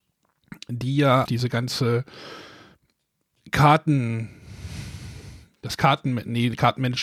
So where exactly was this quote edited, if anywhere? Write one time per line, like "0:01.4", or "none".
0:01.3